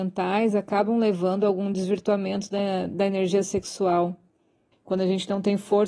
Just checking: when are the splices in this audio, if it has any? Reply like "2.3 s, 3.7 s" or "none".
4.7 s